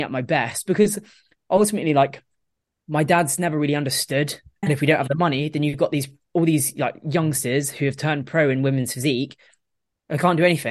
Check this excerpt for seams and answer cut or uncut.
cut